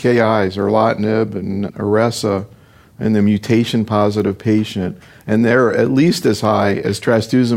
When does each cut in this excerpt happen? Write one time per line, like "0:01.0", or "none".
none